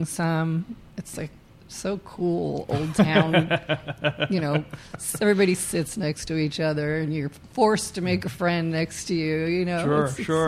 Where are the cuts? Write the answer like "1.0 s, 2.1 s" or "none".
0.9 s